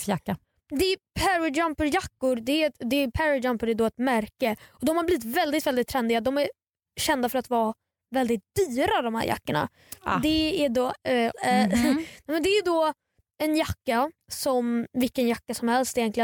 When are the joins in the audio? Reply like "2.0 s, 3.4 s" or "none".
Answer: 11.3 s